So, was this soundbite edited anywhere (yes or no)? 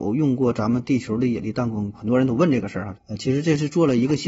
yes